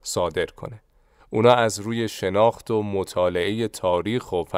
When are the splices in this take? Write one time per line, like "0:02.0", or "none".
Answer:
0:01.2